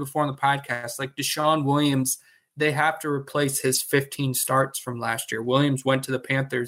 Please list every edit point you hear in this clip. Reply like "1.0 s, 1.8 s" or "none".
none